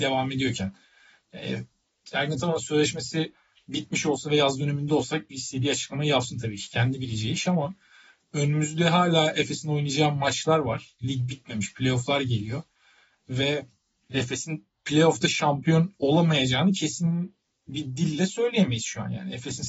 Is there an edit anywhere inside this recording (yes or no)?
no